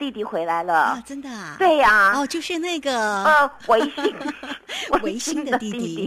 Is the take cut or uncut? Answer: uncut